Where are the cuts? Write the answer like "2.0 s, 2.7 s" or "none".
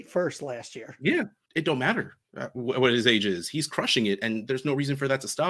1.5 s